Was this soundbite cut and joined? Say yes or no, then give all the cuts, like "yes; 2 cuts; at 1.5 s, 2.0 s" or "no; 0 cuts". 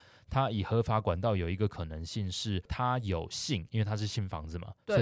no; 0 cuts